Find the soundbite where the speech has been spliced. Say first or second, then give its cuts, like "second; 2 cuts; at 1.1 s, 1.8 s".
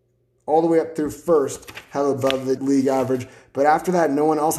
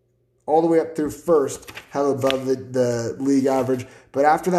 first; 1 cut; at 2.6 s